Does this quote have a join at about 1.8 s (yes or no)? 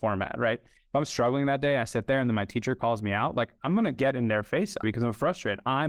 no